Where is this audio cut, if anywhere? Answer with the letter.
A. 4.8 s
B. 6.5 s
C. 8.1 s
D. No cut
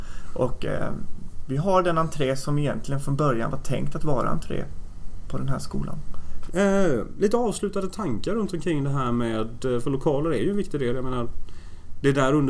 B